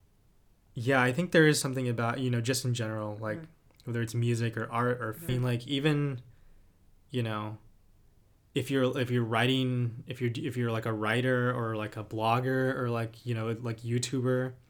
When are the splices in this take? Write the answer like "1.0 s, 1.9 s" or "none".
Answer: 5.3 s